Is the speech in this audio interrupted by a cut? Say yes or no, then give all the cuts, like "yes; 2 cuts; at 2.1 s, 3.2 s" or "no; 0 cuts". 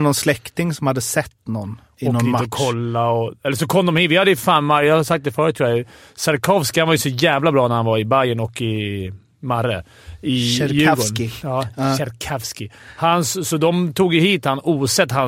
no; 0 cuts